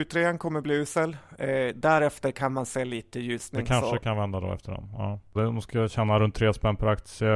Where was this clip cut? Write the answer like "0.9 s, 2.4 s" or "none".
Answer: 5.4 s